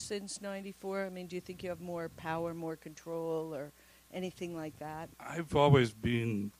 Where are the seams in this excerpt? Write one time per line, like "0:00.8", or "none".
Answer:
0:05.1